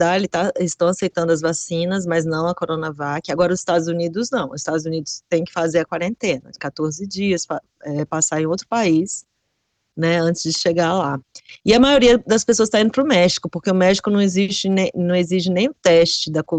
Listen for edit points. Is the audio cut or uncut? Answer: uncut